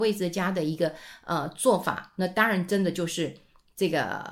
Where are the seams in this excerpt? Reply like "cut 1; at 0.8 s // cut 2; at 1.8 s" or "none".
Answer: none